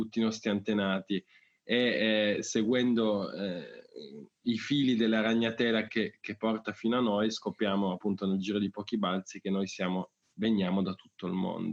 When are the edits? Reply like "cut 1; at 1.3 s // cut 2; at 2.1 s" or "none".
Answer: cut 1; at 5.9 s